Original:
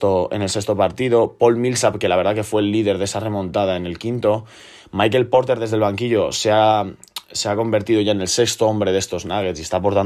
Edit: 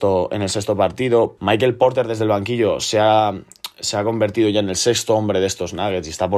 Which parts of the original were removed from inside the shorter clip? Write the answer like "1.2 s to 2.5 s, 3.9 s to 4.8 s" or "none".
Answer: 1.4 s to 4.9 s